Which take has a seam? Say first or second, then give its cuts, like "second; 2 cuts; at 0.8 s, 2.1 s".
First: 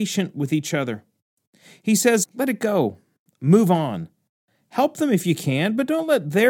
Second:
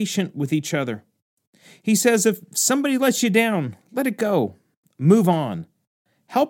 first; 1 cut; at 2.2 s